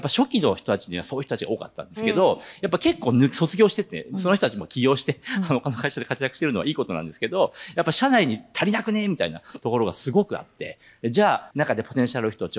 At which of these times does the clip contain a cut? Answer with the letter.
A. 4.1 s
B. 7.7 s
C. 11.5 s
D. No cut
C